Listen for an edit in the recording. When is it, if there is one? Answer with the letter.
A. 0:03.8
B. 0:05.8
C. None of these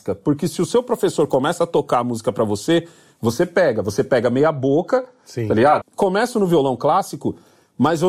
B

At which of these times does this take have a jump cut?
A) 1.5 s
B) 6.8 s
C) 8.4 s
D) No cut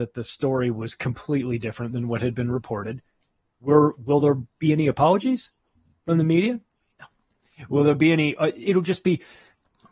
D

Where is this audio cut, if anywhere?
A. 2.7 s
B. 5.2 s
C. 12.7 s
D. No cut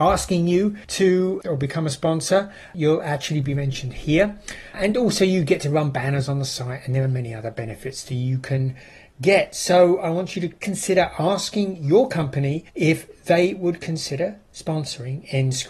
C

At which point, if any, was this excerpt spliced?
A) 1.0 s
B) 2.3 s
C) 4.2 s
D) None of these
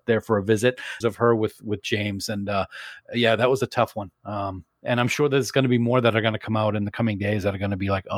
A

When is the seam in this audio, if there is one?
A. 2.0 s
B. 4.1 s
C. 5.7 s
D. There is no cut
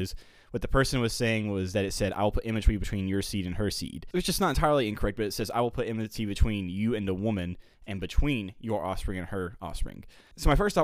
D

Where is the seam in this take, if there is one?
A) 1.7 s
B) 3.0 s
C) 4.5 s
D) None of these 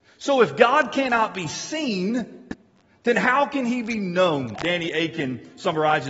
C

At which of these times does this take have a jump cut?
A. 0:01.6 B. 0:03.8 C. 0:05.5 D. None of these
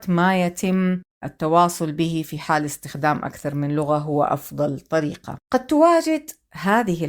C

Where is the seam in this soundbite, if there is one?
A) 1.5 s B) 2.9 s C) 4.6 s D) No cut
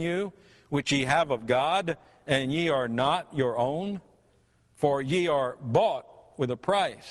D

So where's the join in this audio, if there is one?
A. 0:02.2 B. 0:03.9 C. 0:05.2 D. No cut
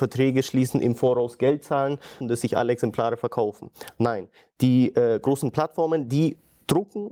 A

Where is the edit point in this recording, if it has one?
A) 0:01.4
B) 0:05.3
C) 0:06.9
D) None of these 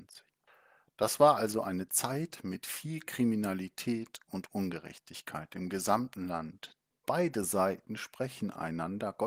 C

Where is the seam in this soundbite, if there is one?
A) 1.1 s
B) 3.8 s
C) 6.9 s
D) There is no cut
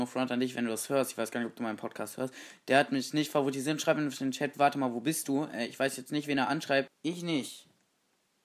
C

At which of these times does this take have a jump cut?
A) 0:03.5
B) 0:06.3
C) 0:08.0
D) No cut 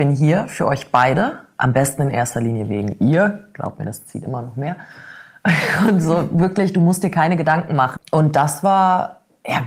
C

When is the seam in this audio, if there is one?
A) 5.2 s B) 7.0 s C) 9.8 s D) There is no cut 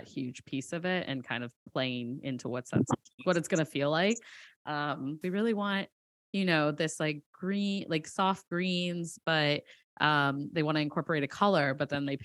A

